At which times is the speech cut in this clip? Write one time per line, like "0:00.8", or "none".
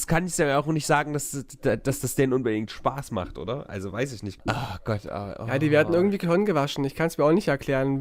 0:04.4